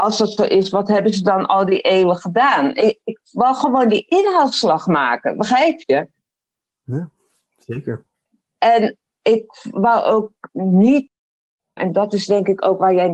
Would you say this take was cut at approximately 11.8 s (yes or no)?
yes